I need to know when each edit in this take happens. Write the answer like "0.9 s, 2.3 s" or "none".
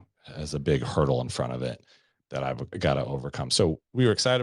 2.7 s